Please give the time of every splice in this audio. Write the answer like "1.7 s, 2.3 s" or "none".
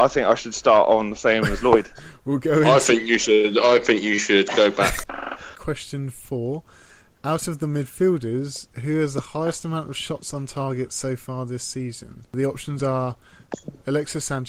5.0 s